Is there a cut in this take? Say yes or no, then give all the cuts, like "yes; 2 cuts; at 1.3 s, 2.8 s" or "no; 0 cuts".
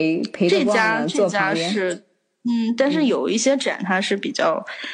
no; 0 cuts